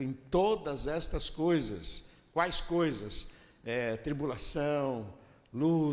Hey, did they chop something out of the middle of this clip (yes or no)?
no